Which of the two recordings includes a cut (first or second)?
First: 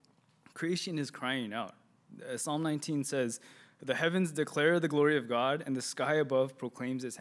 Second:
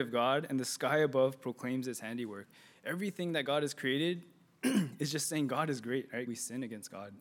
second